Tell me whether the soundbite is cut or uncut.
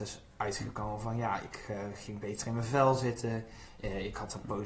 uncut